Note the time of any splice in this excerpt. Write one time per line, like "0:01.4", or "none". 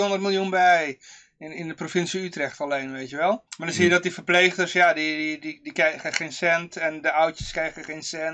0:03.5